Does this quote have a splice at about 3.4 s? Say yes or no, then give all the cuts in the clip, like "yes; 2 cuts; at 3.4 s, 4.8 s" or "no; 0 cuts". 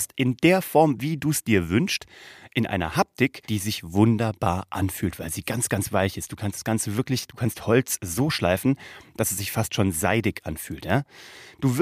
yes; 1 cut; at 3.4 s